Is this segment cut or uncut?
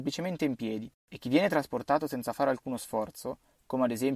cut